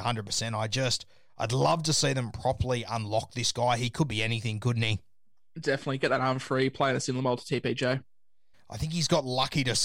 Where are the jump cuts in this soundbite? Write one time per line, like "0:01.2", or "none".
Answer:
0:08.5